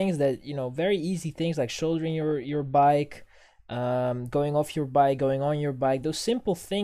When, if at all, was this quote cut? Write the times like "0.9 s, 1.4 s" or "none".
none